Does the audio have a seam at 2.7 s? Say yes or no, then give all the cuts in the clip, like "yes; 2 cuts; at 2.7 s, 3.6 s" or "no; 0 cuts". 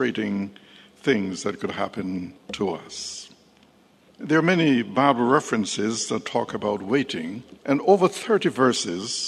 no; 2 cuts; at 4.1 s, 7.6 s